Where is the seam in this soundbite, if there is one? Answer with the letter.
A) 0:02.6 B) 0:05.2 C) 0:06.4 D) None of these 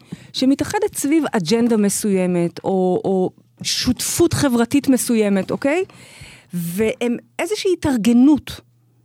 D